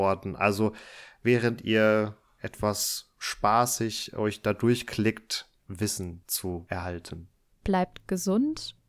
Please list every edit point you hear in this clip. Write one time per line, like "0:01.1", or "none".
0:05.6
0:07.5